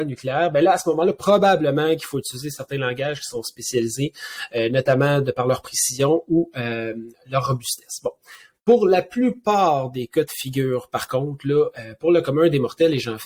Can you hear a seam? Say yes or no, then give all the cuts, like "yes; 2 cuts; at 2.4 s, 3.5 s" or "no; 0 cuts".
no; 0 cuts